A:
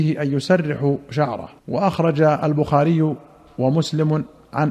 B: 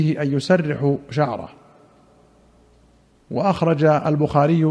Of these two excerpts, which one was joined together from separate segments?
A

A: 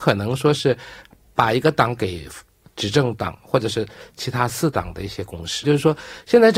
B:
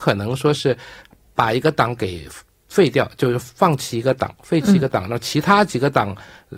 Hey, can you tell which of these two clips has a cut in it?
A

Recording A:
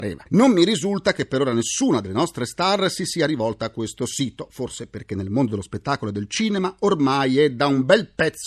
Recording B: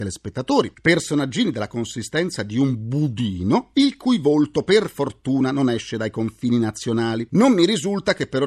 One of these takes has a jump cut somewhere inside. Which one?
B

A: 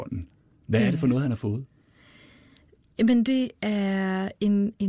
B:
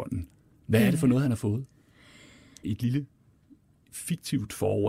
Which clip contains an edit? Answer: B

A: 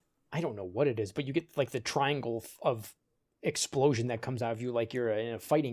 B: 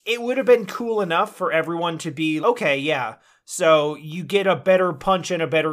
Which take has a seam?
B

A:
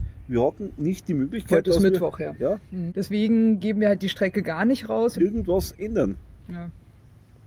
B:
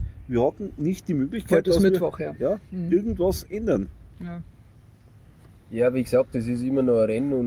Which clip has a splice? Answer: A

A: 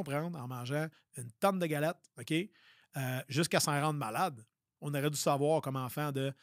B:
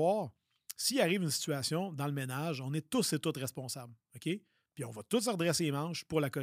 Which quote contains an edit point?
A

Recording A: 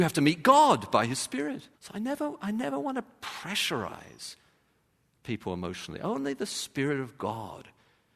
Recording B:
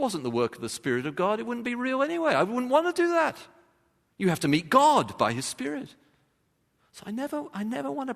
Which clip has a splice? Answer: A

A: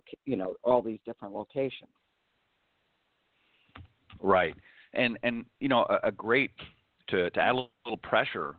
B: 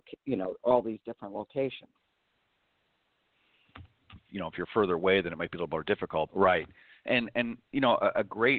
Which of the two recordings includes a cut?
B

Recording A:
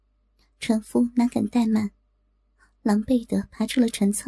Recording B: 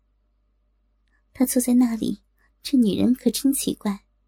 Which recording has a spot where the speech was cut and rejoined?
B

